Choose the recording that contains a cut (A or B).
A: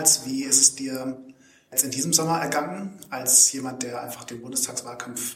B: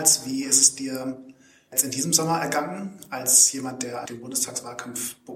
B